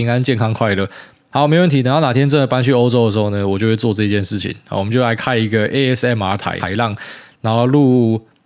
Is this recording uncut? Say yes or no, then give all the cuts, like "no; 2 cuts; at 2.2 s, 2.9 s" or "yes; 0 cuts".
no; 1 cut; at 6.6 s